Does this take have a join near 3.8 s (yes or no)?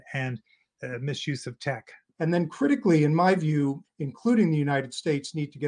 yes